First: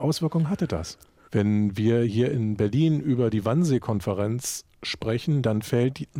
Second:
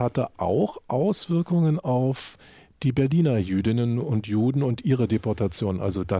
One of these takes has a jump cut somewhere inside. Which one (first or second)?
first